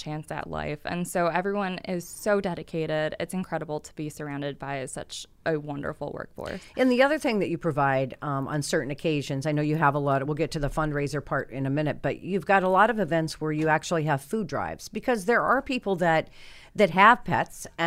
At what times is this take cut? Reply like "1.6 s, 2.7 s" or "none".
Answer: none